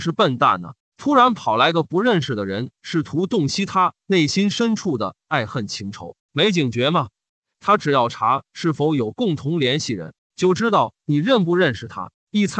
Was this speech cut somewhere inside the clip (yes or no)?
yes